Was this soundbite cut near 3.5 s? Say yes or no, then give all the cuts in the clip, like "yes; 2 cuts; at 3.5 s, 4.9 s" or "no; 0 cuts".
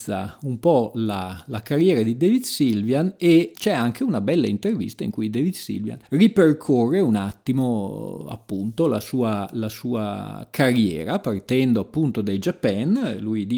yes; 2 cuts; at 3.5 s, 6.1 s